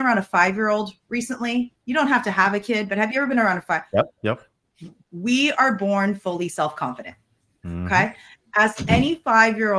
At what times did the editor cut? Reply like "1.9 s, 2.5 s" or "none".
none